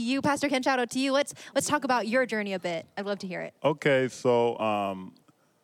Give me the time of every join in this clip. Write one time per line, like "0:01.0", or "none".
none